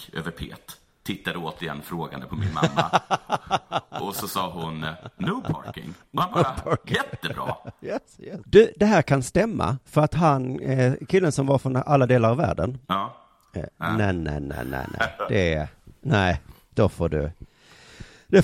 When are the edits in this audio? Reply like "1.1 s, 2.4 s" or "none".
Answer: 8.4 s, 13.7 s